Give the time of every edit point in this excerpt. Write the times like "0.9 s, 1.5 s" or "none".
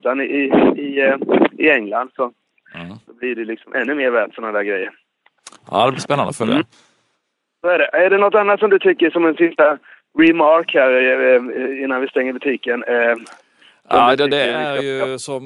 none